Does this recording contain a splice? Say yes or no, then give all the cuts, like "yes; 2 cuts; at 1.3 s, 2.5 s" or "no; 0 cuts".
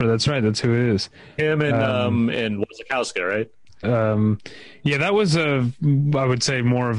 yes; 1 cut; at 3.8 s